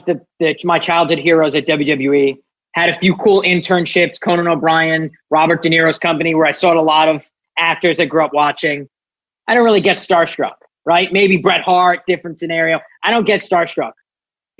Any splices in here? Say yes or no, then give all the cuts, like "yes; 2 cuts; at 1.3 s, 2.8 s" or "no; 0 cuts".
no; 0 cuts